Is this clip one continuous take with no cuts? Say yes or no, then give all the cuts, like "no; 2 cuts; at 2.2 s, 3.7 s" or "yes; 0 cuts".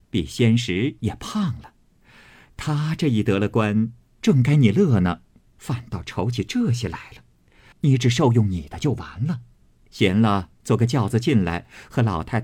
no; 1 cut; at 7.7 s